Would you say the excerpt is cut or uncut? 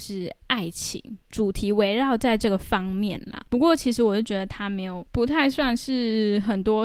cut